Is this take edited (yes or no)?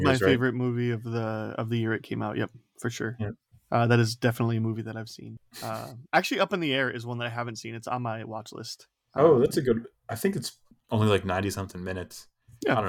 no